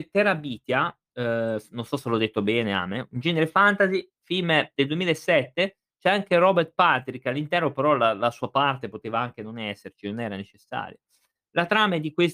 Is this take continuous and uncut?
yes; 0 cuts

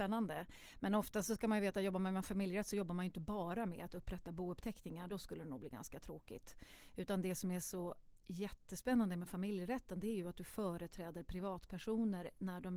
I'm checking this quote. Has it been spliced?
no; 0 cuts

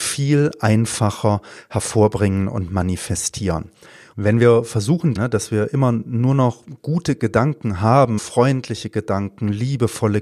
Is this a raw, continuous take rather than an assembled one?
no; 3 cuts; at 4.1 s, 5.2 s, 8.2 s

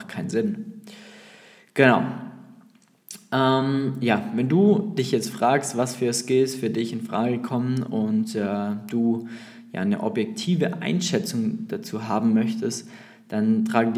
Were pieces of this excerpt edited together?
no; 0 cuts

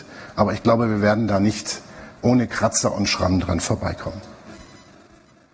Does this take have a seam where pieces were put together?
no; 0 cuts

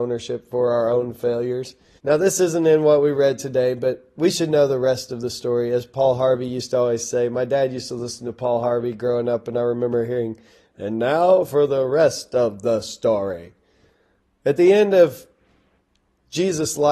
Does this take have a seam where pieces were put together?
yes; 1 cut; at 2.0 s

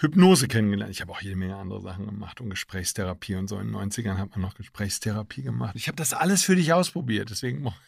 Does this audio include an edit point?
yes; 1 cut; at 5.8 s

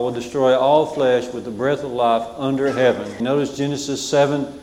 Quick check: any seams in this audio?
yes; 1 cut; at 3.2 s

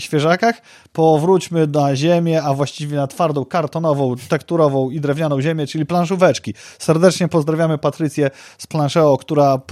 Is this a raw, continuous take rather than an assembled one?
yes; 0 cuts

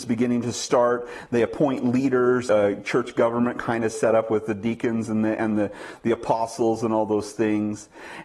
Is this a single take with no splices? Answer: no; 1 cut; at 2.5 s

